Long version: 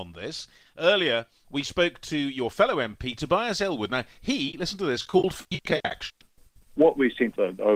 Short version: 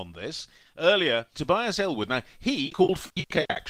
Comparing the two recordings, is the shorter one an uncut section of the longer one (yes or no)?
no